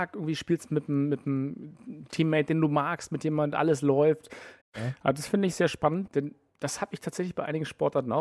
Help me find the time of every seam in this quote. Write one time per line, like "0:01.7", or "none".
0:04.6
0:06.1